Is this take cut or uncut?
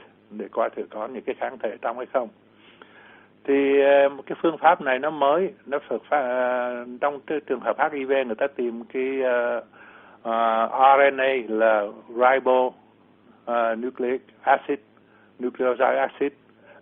uncut